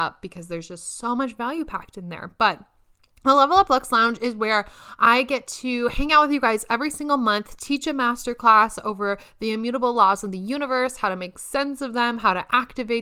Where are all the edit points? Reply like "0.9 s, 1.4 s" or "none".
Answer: none